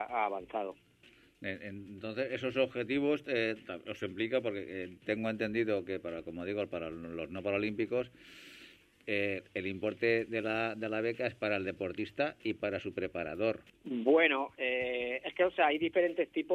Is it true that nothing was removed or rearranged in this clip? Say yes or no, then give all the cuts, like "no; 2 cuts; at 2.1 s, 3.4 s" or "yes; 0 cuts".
no; 1 cut; at 13.7 s